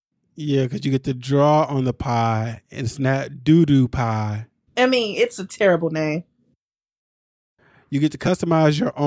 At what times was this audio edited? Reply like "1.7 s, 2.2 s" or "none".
4.7 s